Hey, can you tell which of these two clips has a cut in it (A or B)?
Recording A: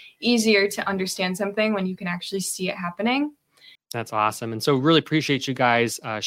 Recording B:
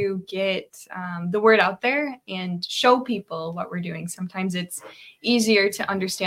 A